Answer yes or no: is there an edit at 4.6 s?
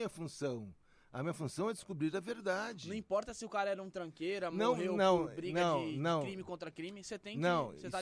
no